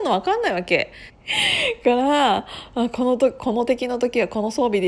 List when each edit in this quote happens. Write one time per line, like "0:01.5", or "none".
0:01.1